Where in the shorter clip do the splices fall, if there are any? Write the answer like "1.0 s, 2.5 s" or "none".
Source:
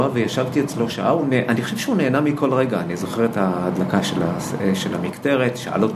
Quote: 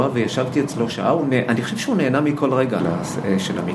2.8 s